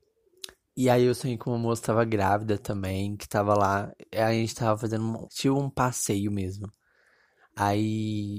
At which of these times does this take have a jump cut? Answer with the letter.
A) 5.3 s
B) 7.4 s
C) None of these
A